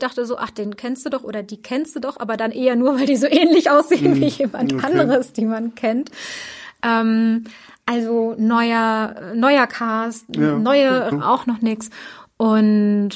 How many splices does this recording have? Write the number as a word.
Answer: one